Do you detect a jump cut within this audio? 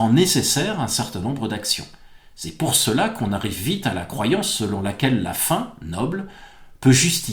no; 0 cuts

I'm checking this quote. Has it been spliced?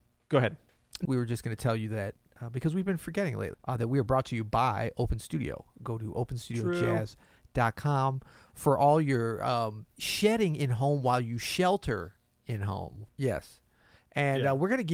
yes; 3 cuts; at 1.1 s, 3.5 s, 13.1 s

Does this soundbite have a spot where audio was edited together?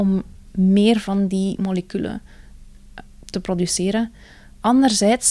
no; 0 cuts

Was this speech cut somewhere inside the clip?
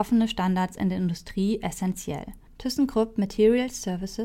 yes; 1 cut; at 2.5 s

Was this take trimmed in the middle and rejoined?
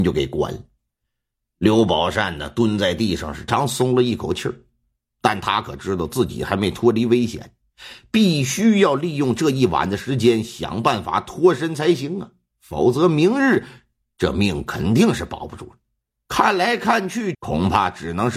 yes; 3 cuts; at 3.5 s, 16.3 s, 17.3 s

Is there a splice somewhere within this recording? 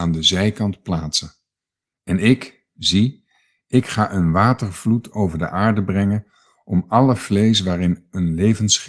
yes; 1 cut; at 1.9 s

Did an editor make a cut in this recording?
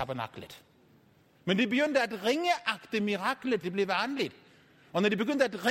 yes; 2 cuts; at 1.3 s, 3.6 s

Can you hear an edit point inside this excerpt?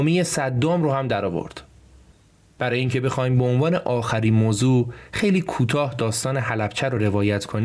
no; 0 cuts

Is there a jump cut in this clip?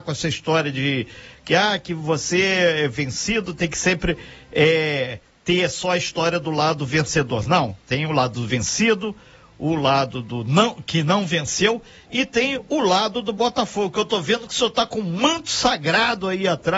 no; 0 cuts

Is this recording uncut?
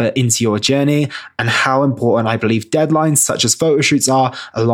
yes; 0 cuts

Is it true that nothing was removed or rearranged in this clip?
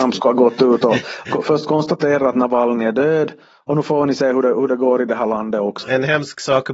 no; 1 cut; at 5.8 s

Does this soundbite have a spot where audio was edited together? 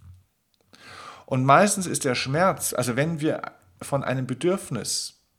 no; 0 cuts

